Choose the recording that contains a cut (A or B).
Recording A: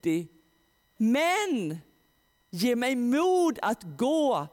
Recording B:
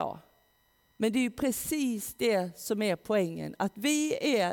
A